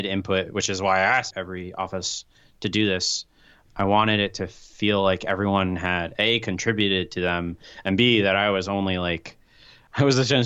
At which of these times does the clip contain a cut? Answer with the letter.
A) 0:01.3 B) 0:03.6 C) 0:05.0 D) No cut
A